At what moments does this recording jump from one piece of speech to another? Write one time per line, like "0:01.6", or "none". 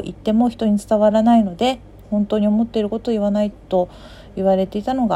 0:03.5